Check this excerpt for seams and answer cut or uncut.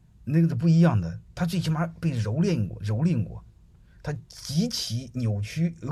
uncut